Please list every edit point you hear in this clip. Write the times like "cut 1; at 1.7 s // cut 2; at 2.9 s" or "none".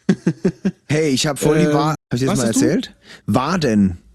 cut 1; at 1.9 s